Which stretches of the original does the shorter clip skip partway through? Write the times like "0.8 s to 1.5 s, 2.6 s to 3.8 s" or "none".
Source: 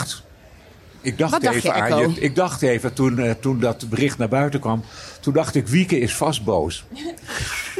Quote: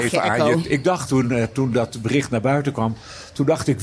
2.6 s to 2.9 s